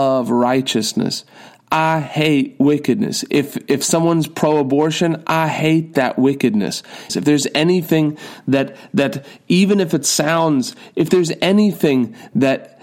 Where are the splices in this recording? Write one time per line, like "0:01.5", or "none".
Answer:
0:07.1